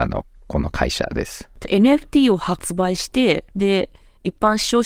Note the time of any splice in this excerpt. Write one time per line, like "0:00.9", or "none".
0:03.5